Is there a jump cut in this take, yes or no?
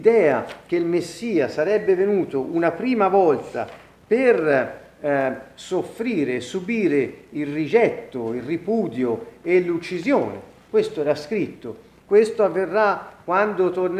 yes